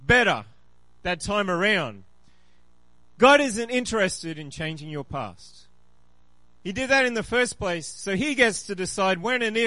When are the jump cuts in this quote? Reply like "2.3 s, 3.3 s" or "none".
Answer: 6.4 s